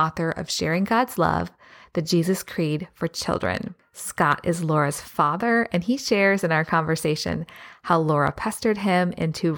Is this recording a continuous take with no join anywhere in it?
yes; 0 cuts

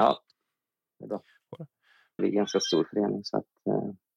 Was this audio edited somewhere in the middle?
yes; 1 cut; at 2.2 s

